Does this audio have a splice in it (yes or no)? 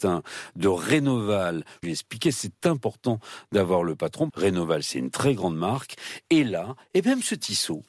yes